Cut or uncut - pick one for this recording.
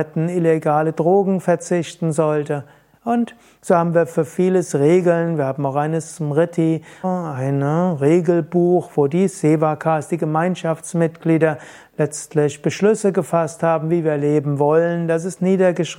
cut